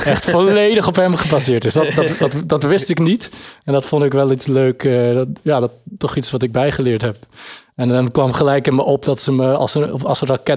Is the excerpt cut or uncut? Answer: uncut